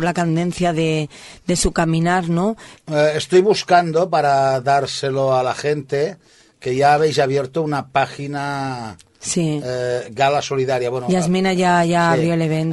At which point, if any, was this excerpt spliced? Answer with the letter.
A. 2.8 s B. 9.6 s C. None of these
A